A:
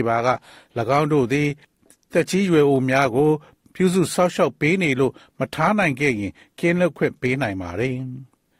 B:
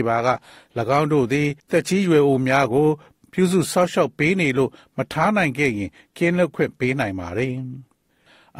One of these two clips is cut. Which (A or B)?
B